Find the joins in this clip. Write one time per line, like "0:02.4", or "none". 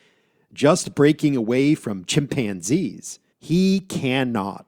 0:03.3